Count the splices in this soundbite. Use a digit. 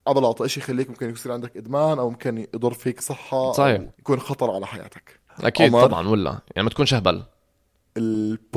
2